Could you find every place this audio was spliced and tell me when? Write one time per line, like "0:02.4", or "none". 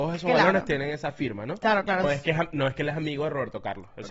0:02.0